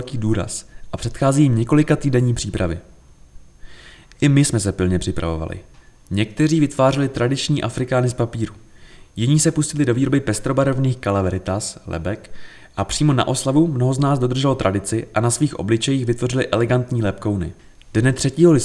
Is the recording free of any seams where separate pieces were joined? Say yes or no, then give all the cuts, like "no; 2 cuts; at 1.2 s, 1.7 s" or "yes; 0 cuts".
yes; 0 cuts